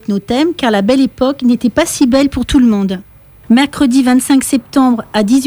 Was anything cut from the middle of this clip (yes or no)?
yes